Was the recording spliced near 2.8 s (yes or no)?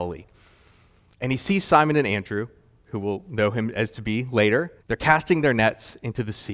yes